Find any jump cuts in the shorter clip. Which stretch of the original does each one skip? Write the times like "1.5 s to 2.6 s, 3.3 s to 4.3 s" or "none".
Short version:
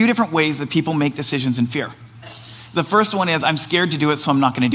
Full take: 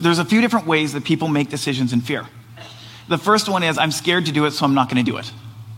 none

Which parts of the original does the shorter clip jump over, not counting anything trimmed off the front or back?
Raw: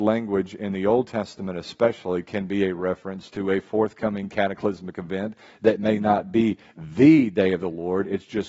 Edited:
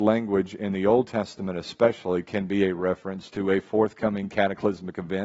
none

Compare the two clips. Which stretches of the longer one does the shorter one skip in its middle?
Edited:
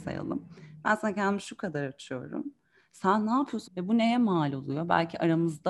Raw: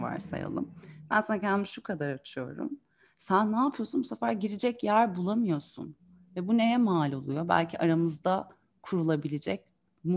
3.9 s to 6.3 s

